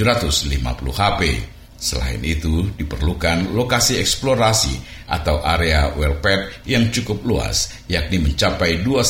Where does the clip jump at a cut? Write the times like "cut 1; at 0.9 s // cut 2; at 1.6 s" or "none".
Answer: cut 1; at 1.7 s